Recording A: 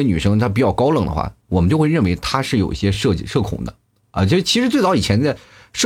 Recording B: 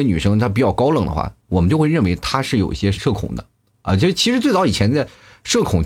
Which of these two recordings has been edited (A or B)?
B